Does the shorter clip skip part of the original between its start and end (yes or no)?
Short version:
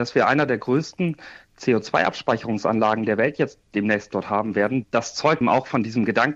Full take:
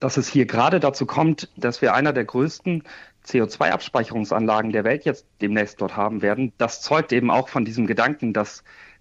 yes